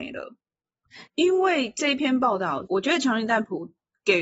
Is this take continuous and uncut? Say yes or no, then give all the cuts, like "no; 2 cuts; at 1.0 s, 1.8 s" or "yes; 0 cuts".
no; 2 cuts; at 1.1 s, 2.7 s